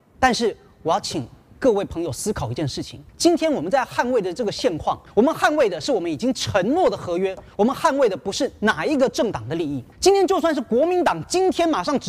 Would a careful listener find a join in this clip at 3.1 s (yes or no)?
yes